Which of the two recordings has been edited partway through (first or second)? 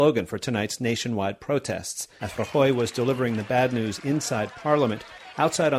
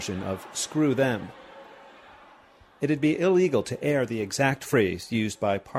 first